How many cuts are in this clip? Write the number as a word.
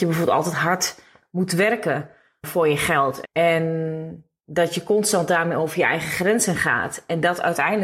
one